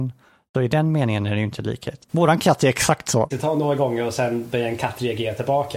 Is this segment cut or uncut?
cut